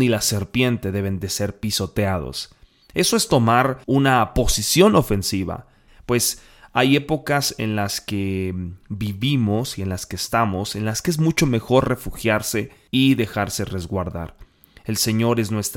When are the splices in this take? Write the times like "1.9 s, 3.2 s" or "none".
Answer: 3.8 s, 5.9 s